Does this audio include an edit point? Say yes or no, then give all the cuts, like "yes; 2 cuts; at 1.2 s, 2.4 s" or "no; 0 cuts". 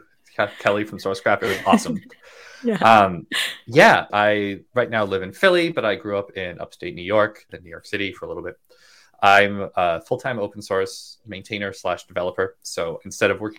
yes; 2 cuts; at 4.1 s, 7.5 s